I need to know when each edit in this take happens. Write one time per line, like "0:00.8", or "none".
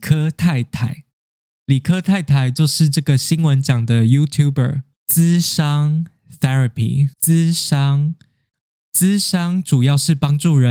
0:05.0
0:07.1